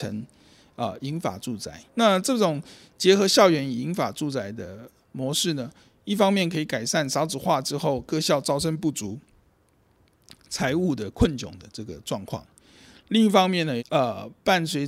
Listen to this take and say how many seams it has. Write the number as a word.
two